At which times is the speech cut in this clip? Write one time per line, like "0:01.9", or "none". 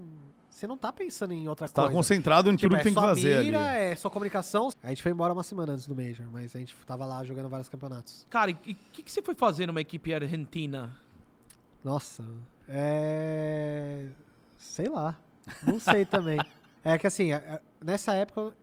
0:04.7
0:12.5
0:16.8